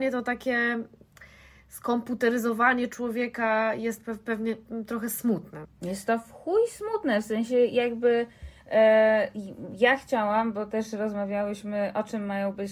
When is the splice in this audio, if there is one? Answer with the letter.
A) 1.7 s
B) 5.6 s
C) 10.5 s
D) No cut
B